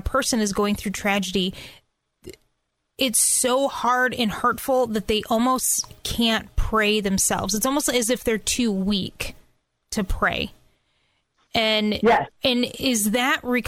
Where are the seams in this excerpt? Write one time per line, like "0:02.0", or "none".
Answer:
none